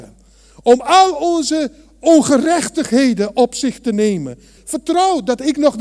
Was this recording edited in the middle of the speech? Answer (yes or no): yes